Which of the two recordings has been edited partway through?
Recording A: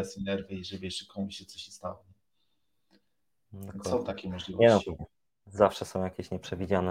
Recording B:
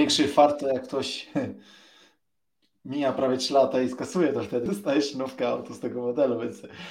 B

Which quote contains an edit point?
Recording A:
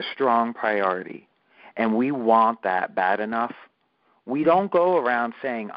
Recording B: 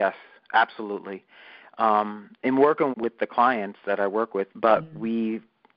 B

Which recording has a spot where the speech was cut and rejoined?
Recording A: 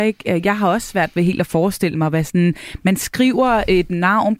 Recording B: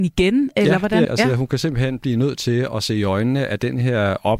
B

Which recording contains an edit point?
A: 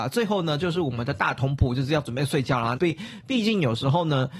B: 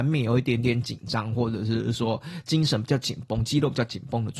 A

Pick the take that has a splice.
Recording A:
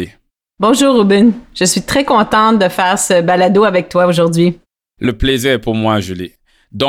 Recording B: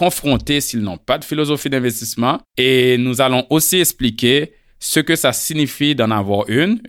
B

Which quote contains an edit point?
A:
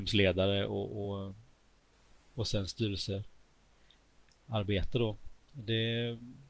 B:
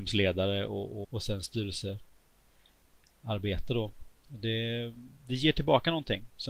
B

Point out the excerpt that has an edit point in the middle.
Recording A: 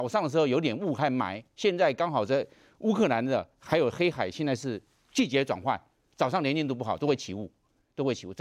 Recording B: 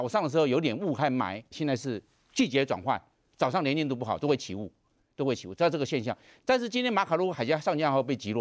B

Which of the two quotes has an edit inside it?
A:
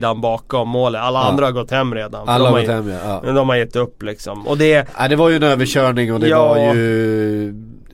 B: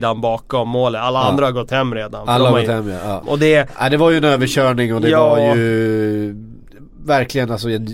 B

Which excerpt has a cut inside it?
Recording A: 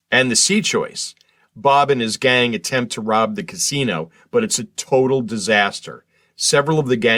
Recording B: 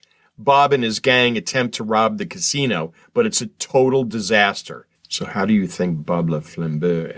B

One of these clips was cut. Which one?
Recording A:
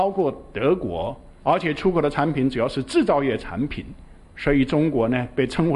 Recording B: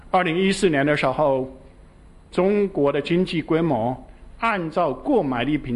A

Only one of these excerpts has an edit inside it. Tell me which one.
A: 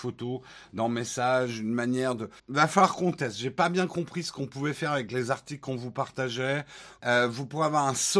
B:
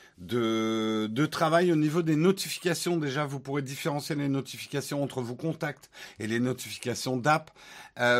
A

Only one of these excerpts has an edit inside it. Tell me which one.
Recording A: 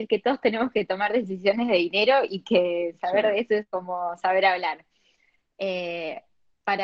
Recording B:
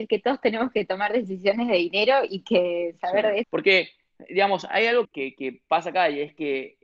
B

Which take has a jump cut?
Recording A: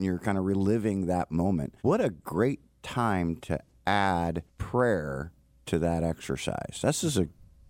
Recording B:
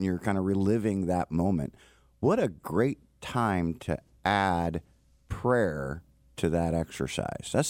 A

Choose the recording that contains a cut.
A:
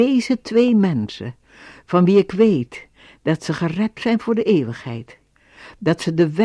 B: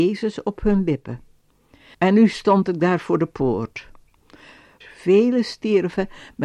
B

